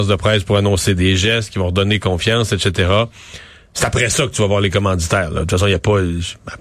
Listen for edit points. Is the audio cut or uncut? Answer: uncut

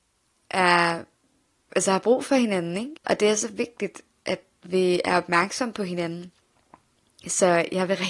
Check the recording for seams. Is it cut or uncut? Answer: cut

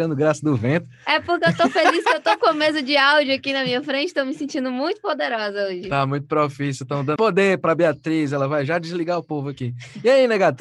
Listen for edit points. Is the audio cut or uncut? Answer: cut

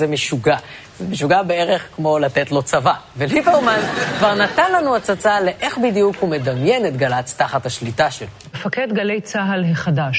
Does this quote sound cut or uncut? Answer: uncut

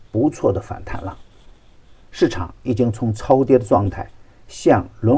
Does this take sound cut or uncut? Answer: uncut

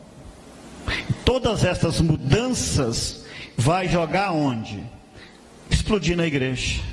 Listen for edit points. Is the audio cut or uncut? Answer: uncut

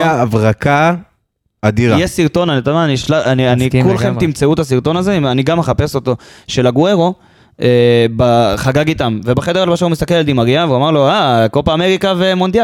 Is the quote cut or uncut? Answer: uncut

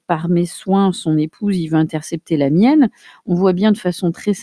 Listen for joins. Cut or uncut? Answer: uncut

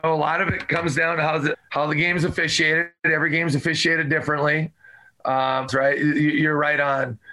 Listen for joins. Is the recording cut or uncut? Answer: cut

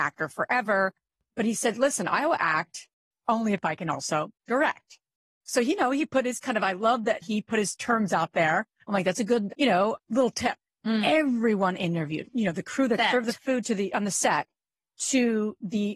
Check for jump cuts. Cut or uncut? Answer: cut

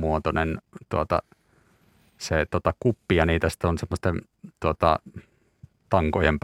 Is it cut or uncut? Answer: uncut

